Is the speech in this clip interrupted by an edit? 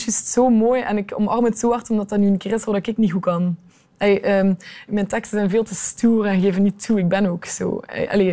yes; 1 cut; at 4.9 s

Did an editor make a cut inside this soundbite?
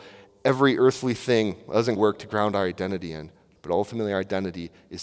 yes; 2 cuts; at 2.0 s, 3.6 s

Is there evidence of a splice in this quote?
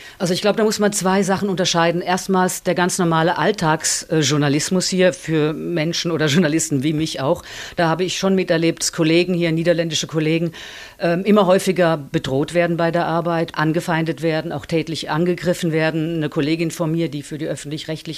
yes; 1 cut; at 13.5 s

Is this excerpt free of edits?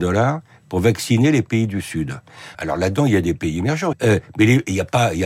no; 2 cuts; at 2.5 s, 3.9 s

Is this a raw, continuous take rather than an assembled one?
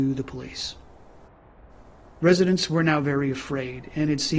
yes; 0 cuts

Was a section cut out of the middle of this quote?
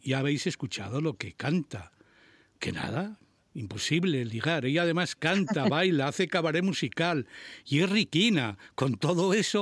no; 0 cuts

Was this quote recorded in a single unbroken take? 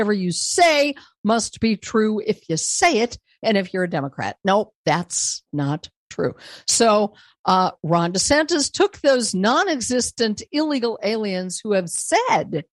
yes; 0 cuts

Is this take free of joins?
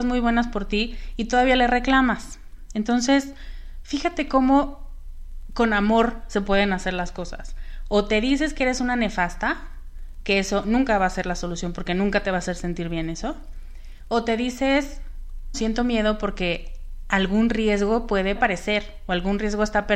no; 2 cuts; at 15.5 s, 18.3 s

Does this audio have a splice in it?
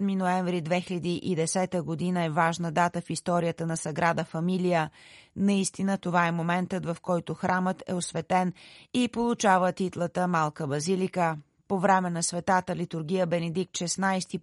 no; 0 cuts

